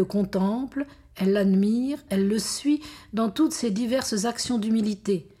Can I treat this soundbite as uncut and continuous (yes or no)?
no